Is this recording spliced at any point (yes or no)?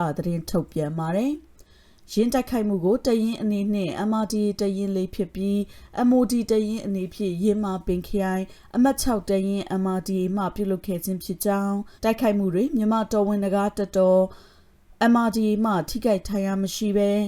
yes